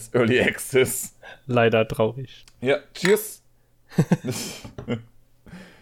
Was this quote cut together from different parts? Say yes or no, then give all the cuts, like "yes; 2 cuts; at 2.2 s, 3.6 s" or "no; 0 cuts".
yes; 1 cut; at 2.4 s